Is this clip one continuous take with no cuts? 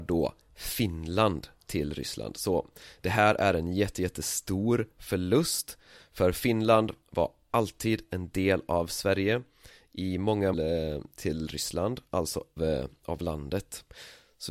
no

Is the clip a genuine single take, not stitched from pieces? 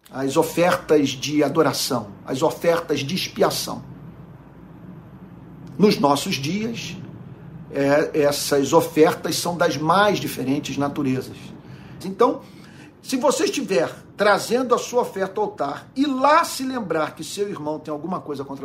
no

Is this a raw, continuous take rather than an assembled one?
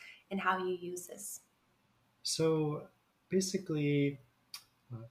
no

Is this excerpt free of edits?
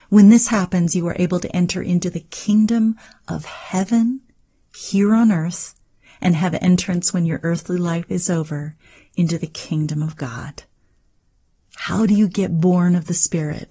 yes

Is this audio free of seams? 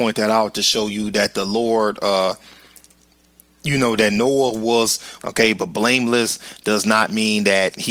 no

